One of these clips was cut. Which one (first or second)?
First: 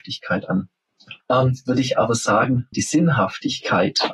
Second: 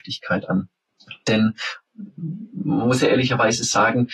first